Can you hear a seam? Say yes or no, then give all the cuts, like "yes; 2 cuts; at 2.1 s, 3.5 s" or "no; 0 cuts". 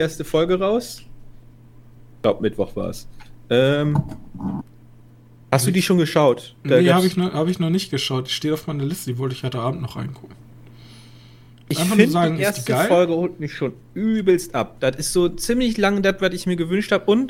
no; 0 cuts